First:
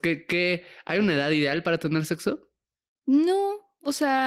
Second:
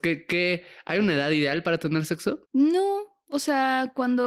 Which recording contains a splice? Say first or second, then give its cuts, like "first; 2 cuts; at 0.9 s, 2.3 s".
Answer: second; 1 cut; at 2.4 s